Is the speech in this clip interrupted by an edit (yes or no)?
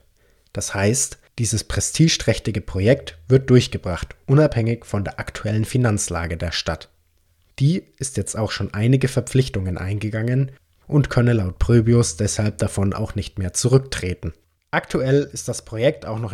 no